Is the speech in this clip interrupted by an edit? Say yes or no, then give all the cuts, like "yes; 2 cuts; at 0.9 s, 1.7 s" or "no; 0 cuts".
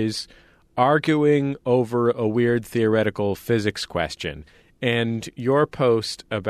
no; 0 cuts